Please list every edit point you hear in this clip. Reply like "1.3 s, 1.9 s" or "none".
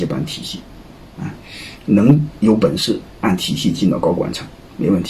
none